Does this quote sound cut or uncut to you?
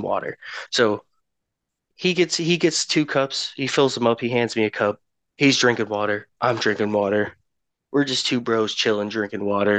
uncut